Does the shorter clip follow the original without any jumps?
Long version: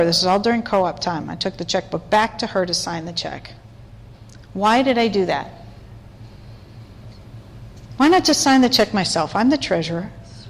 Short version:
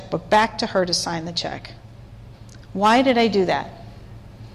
yes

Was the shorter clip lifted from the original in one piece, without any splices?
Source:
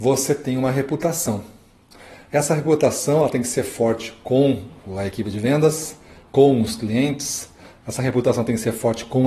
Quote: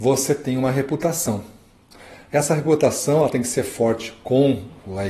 yes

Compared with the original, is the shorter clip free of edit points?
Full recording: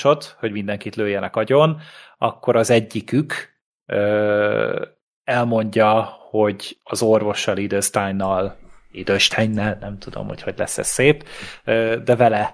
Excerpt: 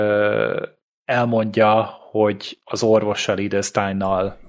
yes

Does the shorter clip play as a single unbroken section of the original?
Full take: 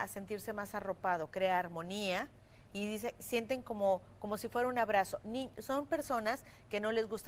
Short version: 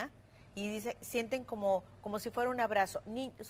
yes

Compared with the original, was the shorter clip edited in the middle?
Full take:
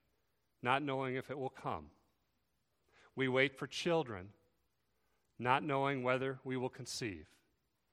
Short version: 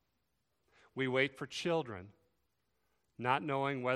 no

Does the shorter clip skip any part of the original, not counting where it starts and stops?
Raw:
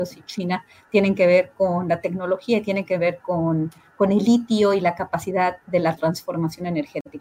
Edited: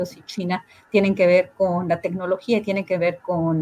no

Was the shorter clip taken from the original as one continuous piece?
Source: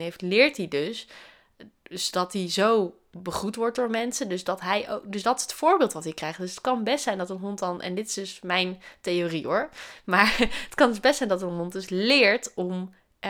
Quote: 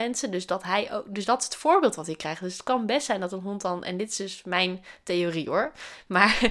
yes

